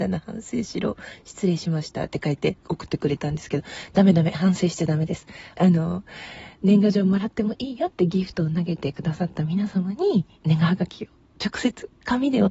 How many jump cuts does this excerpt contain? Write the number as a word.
two